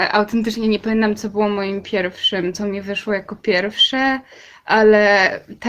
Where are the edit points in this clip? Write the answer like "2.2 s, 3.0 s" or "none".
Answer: none